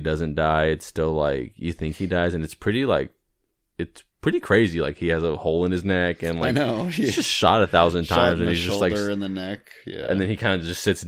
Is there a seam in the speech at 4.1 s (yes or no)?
yes